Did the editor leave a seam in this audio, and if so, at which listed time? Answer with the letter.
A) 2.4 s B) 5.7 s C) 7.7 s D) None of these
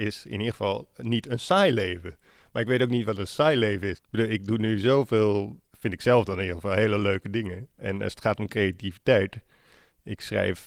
B